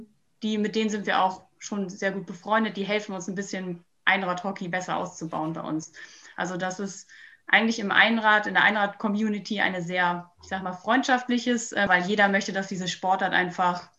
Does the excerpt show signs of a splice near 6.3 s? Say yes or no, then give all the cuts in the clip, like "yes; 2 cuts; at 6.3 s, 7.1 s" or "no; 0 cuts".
no; 2 cuts; at 10.4 s, 11.9 s